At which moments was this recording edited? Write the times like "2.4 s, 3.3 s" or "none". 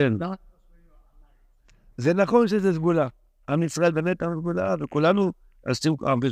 none